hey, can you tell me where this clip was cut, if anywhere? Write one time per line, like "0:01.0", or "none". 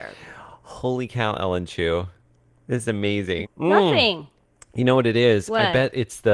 0:03.4